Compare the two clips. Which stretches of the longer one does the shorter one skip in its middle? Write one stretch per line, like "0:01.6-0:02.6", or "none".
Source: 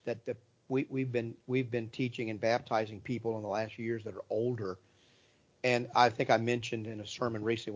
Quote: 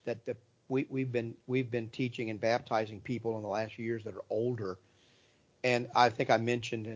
none